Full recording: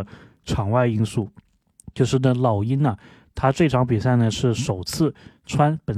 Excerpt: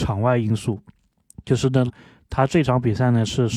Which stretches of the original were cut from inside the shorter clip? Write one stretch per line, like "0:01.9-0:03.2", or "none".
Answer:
0:02.4-0:02.9